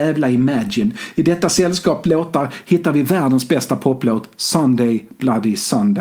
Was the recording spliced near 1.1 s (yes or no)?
no